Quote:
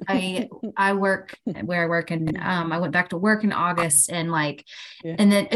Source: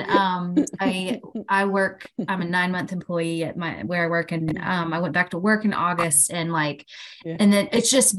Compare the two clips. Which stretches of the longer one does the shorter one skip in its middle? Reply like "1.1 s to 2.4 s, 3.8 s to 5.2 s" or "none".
2.3 s to 3.8 s